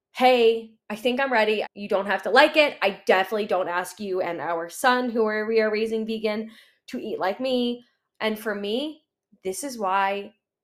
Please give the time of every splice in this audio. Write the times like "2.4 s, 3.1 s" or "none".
1.6 s, 8.1 s